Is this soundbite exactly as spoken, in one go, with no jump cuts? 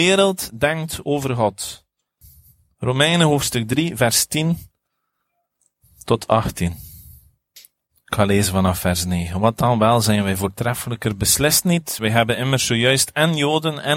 yes; 0 cuts

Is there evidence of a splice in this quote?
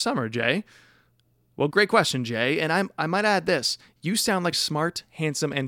yes; 2 cuts; at 1.7 s, 4.5 s

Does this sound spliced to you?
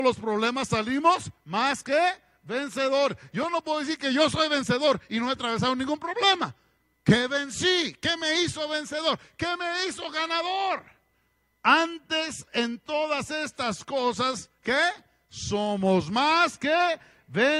yes; 1 cut; at 11.6 s

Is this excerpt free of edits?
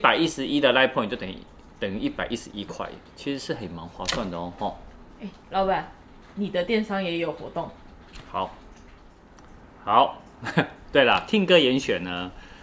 no; 1 cut; at 3.1 s

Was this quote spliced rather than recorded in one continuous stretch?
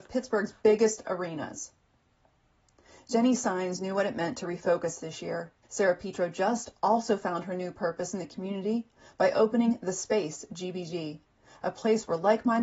yes; 1 cut; at 5.6 s

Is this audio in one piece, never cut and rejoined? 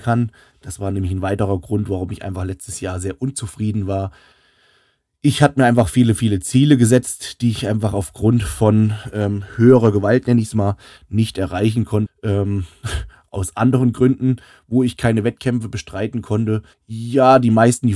no; 2 cuts; at 12.1 s, 16.7 s

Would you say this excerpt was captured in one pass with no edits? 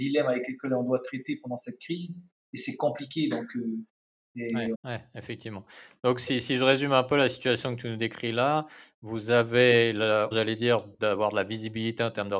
no; 2 cuts; at 4.7 s, 10.3 s

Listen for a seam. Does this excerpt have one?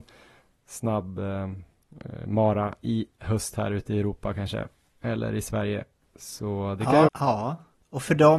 yes; 1 cut; at 7.1 s

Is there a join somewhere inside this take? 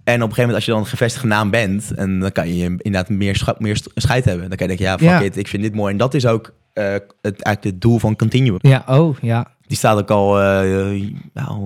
yes; 1 cut; at 8.6 s

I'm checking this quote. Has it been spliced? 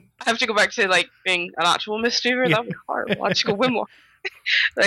no; 0 cuts

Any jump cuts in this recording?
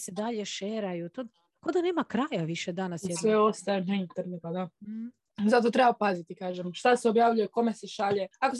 yes; 1 cut; at 4.4 s

